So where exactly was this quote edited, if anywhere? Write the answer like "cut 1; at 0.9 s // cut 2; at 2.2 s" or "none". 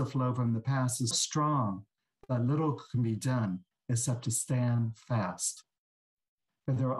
cut 1; at 1.1 s